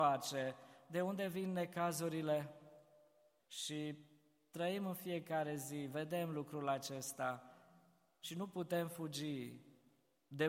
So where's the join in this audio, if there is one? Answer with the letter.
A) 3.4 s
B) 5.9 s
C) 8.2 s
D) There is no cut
A